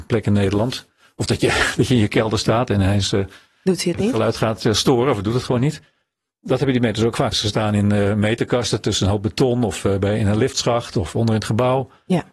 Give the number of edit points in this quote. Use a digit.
1